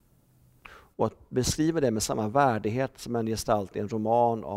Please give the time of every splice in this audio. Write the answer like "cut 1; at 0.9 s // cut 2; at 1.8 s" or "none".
cut 1; at 0.9 s